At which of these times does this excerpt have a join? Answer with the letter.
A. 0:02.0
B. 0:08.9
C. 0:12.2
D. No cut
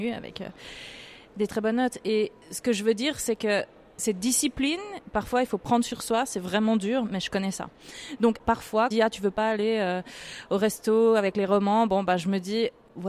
B